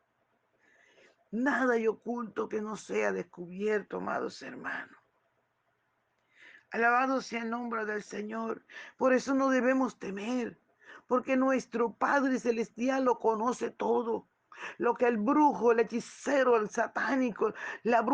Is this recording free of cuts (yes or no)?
no